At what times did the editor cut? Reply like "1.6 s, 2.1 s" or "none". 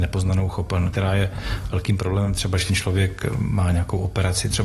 0.9 s